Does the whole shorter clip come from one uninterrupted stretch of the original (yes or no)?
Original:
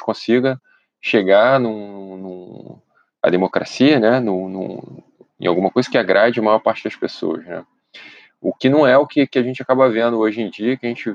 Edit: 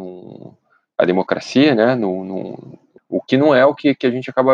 no